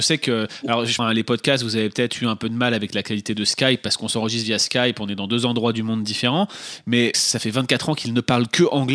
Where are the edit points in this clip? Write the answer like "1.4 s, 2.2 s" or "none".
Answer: 1.0 s, 7.1 s